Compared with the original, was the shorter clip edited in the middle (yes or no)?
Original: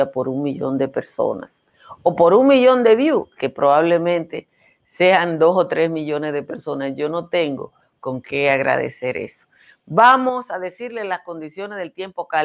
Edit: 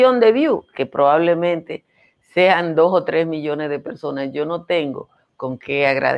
no